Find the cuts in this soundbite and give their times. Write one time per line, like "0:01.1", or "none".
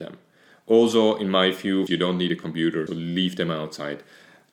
0:01.9
0:02.9